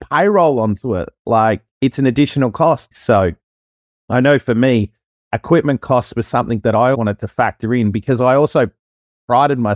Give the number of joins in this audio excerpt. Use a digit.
3